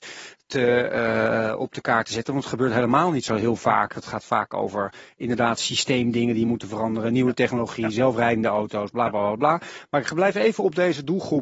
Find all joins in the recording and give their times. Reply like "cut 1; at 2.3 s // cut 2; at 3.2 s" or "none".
cut 1; at 9.9 s